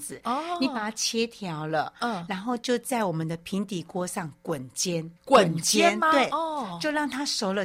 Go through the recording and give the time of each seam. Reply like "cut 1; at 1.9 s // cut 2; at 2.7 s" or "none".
cut 1; at 5.2 s

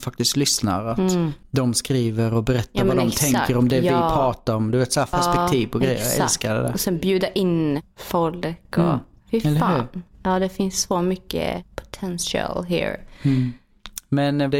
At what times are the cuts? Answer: cut 1; at 5.1 s

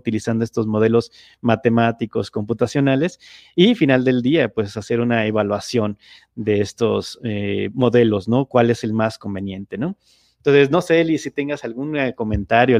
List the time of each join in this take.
none

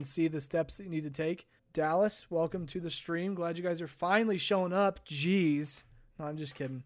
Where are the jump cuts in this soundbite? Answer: cut 1; at 1.6 s

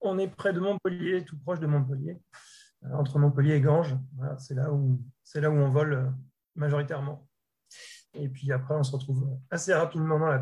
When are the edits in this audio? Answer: cut 1; at 8.1 s

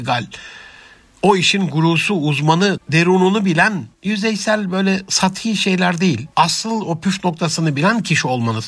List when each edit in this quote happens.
cut 1; at 2.8 s // cut 2; at 3.9 s // cut 3; at 6.3 s

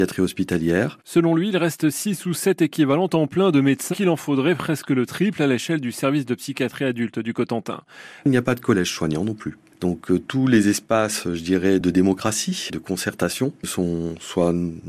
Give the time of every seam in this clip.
cut 1; at 3.9 s // cut 2; at 8.2 s

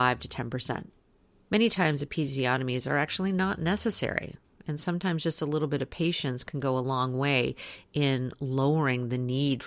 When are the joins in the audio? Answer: cut 1; at 1.5 s

